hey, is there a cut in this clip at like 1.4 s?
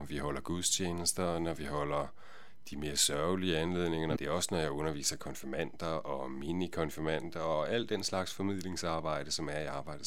no; 1 cut; at 4.2 s

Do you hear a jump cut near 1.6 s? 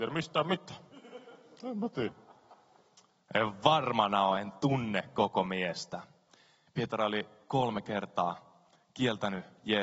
no; 2 cuts; at 3.2 s, 6.7 s

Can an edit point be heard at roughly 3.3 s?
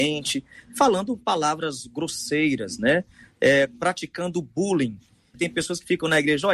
no; 1 cut; at 5.3 s

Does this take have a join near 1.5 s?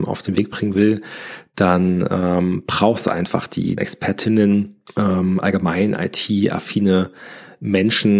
no; 1 cut; at 3.8 s

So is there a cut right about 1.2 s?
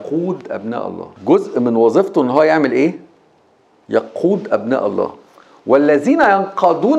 yes; 1 cut; at 1.2 s

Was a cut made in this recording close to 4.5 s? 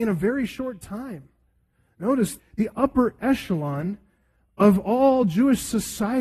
no; 1 cut; at 2.4 s

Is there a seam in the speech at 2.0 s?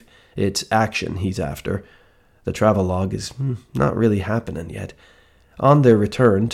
no; 0 cuts

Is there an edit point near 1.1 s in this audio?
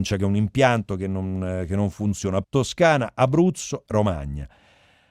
no; 2 cuts; at 2.4 s, 3.9 s

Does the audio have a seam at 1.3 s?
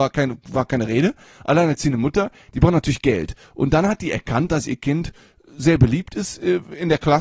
no; 0 cuts

